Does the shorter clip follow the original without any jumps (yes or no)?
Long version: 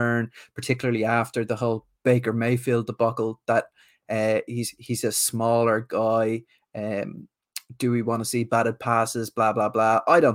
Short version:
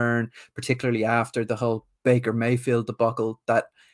yes